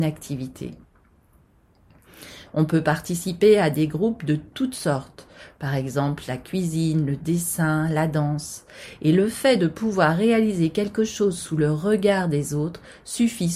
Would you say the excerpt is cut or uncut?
cut